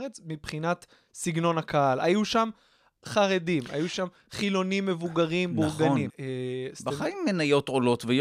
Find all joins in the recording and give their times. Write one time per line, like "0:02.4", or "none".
0:06.1